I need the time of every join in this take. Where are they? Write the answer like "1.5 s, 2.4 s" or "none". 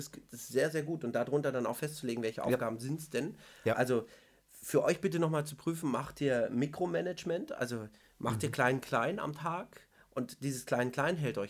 none